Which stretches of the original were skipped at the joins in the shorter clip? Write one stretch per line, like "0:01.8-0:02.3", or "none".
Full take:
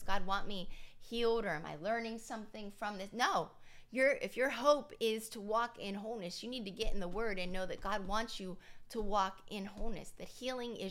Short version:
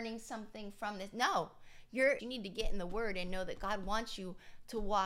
0:04.2-0:06.4